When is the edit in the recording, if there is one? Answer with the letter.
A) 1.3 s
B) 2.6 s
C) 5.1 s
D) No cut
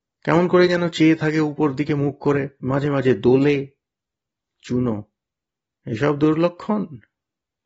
B